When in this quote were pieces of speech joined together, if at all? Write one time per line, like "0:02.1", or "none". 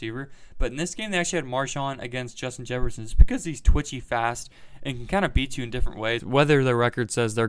0:06.2